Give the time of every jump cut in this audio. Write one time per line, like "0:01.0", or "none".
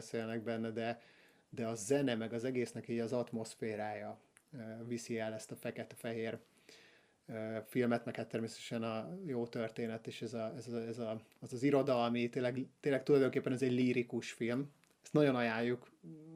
none